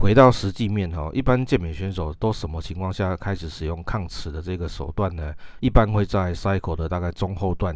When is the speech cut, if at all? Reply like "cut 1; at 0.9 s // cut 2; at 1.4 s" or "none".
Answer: none